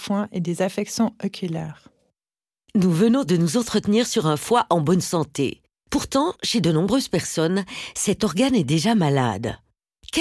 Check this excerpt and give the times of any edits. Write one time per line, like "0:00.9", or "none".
none